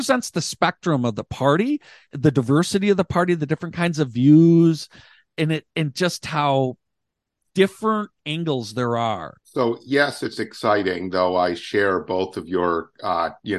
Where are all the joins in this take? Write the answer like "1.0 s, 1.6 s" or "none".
9.4 s

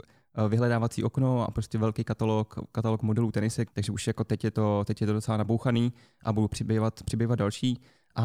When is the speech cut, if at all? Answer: 3.7 s

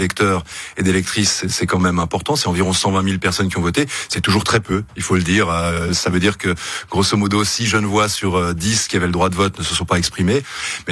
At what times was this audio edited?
none

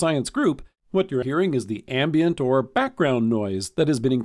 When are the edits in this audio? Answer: 1.2 s

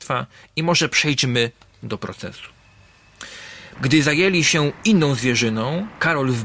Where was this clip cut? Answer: 3.7 s

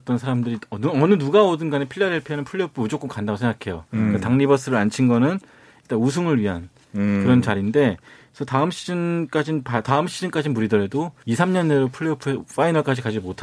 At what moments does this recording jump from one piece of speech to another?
11.2 s

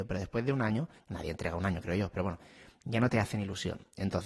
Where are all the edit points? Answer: 1.0 s

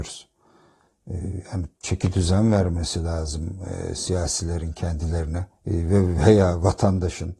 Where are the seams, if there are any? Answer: 1.7 s, 5.5 s

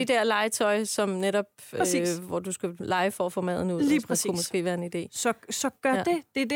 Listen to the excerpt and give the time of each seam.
none

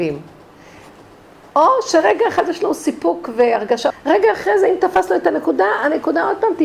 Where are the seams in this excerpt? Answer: 3.9 s

